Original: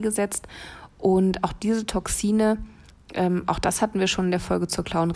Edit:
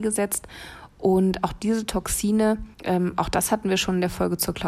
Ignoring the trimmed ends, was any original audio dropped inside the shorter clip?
yes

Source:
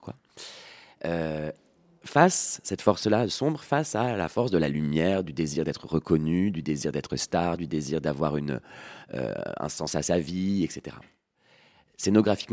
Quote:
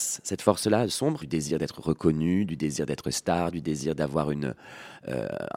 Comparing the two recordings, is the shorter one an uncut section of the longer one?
no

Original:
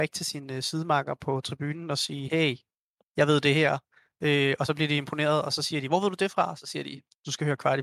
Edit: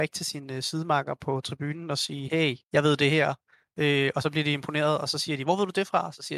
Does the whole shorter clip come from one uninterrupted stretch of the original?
no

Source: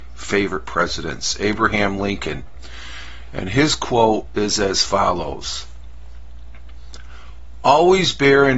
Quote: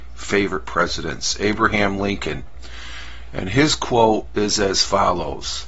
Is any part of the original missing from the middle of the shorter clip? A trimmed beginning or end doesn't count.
no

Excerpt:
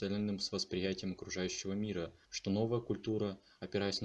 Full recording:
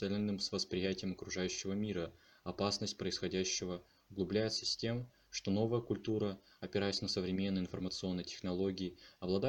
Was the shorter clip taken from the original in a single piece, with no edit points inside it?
no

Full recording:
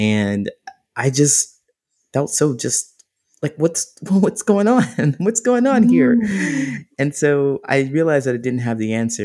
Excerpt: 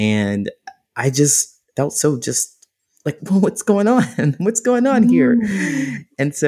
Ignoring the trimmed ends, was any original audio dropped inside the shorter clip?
yes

